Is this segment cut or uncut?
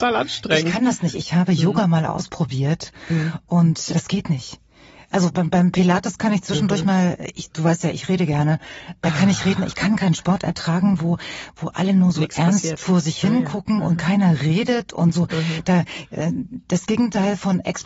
uncut